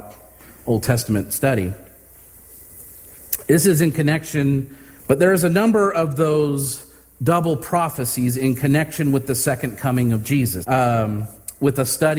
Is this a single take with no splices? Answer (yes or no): no